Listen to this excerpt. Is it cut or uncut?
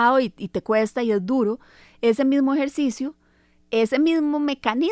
uncut